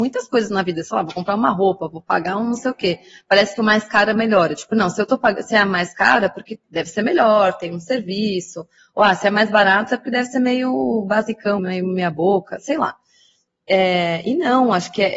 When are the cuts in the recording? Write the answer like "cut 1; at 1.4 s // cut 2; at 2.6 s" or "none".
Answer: cut 1; at 6.6 s // cut 2; at 8.8 s // cut 3; at 11.6 s